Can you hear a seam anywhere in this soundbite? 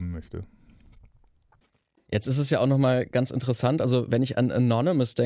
no; 0 cuts

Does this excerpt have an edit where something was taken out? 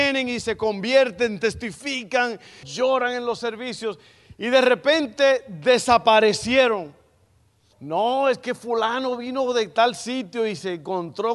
yes; 2 cuts; at 2.6 s, 7.7 s

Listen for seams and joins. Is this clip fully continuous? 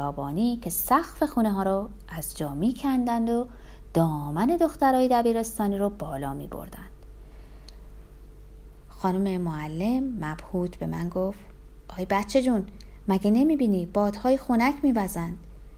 no; 1 cut; at 8.8 s

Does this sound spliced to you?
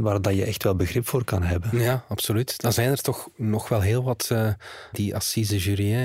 yes; 1 cut; at 4.9 s

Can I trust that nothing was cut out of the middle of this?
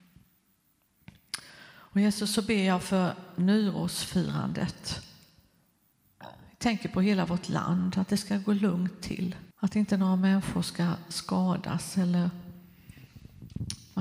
no; 1 cut; at 9.5 s

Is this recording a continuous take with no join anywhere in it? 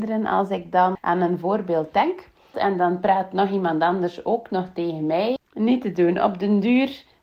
no; 3 cuts; at 1.0 s, 2.5 s, 5.4 s

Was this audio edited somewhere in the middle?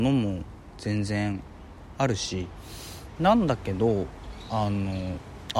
yes; 1 cut; at 3.2 s

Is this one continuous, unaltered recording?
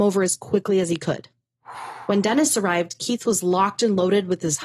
yes; 0 cuts

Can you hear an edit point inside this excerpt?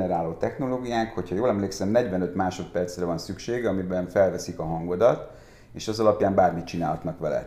no; 0 cuts

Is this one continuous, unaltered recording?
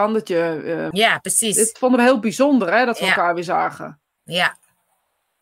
no; 1 cut; at 0.9 s

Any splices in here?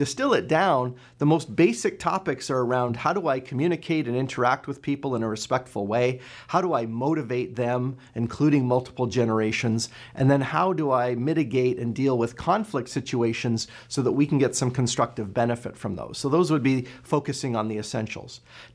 no; 0 cuts

